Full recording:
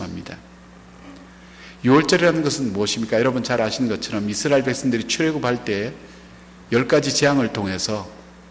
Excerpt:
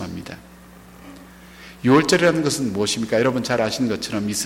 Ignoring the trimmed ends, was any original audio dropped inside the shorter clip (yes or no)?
no